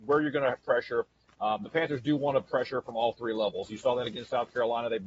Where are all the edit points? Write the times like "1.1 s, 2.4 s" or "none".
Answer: none